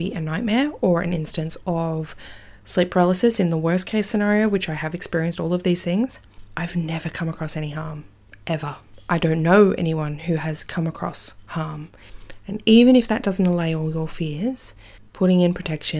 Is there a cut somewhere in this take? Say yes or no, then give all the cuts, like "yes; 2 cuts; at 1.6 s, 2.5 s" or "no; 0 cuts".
no; 0 cuts